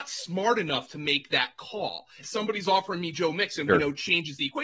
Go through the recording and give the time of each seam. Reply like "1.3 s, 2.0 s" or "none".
2.2 s, 3.7 s